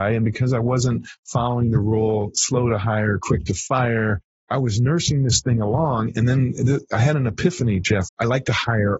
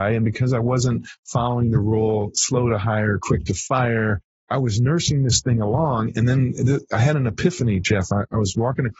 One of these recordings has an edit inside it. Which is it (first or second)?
first